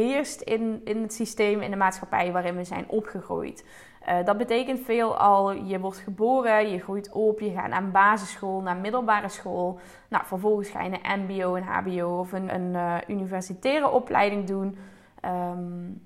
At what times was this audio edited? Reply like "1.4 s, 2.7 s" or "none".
12.5 s